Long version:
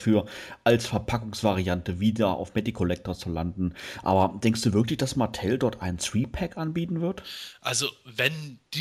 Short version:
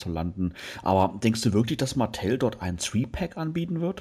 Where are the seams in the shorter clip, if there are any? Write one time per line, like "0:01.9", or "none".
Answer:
none